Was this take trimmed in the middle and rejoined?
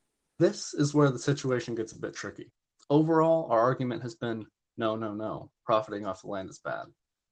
no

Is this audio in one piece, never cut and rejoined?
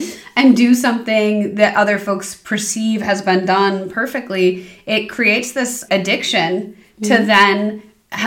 no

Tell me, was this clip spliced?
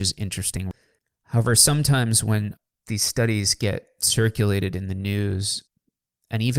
no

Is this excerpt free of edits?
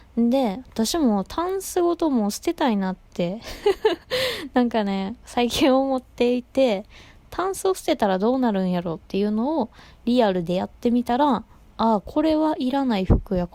yes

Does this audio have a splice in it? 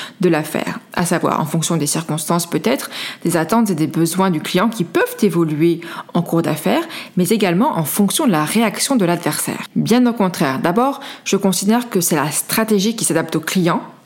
yes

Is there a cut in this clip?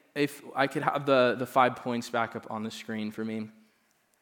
no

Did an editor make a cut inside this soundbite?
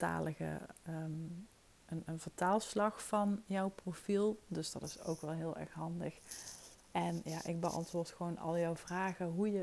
no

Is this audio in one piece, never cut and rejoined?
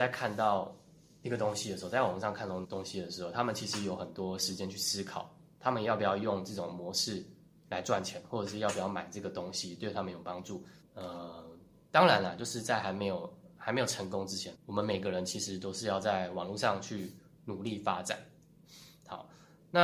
no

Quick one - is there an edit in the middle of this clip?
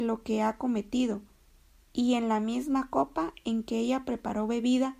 no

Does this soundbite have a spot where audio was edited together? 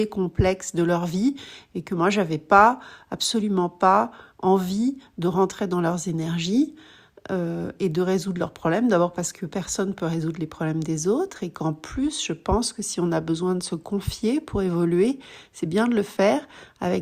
no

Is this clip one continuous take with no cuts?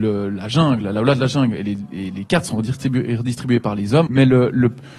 no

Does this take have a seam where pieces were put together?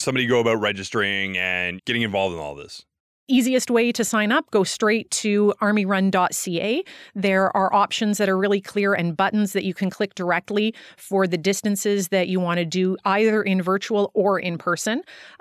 yes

